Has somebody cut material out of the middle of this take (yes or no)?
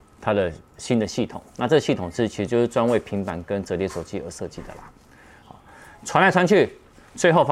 no